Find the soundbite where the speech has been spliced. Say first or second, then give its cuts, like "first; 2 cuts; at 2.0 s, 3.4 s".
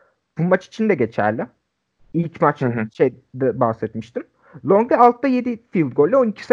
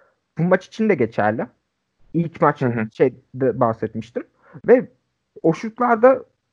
second; 1 cut; at 4.6 s